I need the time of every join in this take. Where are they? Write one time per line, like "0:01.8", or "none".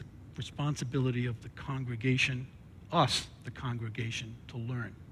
none